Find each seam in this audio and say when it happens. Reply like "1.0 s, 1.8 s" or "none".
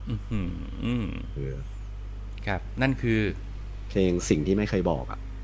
1.4 s

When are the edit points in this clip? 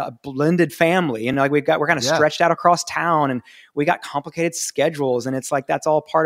none

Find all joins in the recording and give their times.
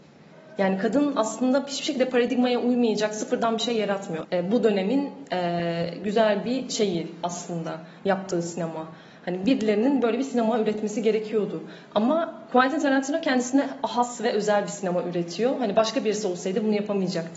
4.2 s

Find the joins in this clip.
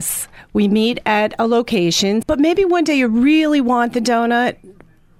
2.2 s

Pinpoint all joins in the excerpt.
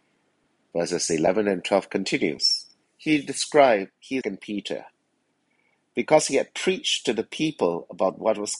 2.8 s, 4.2 s

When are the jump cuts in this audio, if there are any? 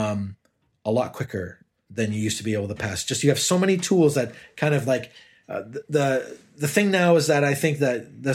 1.9 s

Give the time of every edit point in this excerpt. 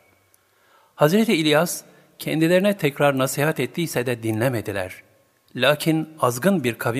2.8 s, 5.5 s

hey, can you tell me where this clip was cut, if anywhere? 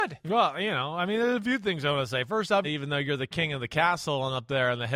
2.6 s

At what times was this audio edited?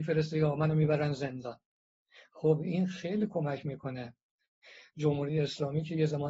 none

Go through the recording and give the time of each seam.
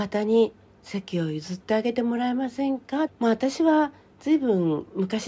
3.1 s

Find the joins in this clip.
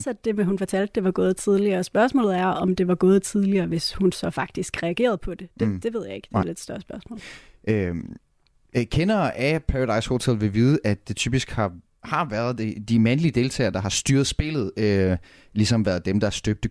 none

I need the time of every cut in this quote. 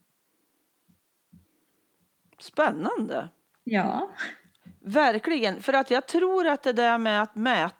none

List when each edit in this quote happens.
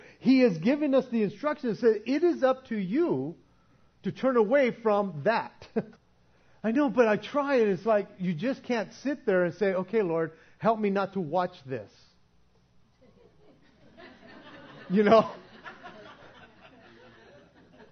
6.0 s

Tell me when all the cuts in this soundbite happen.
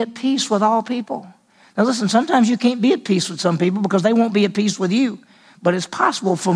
none

